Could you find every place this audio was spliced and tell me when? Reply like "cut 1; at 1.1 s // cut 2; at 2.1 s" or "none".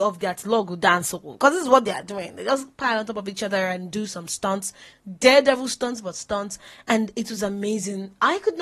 none